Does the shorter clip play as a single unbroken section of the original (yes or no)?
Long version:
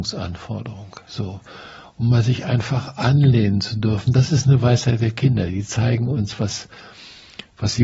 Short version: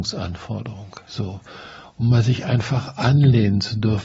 yes